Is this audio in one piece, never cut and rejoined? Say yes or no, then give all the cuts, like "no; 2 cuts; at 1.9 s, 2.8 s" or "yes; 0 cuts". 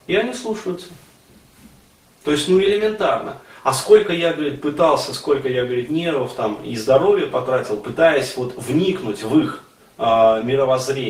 yes; 0 cuts